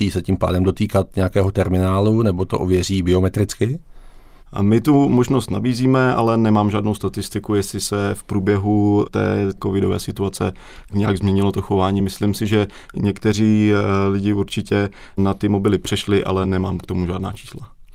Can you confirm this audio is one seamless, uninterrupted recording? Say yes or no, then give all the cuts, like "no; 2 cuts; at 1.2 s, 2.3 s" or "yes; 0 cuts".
yes; 0 cuts